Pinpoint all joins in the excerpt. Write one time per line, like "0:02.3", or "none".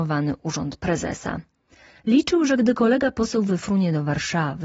none